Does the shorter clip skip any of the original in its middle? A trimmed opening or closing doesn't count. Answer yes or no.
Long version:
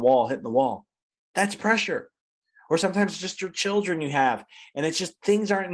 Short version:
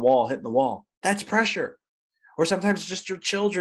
yes